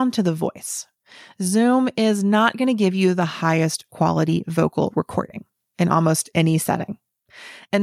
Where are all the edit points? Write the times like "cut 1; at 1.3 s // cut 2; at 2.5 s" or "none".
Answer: none

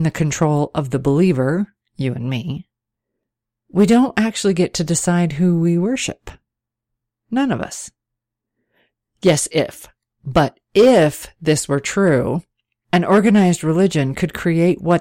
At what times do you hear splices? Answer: none

